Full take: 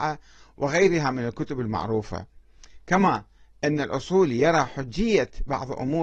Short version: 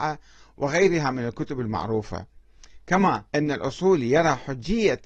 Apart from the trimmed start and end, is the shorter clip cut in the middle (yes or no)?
yes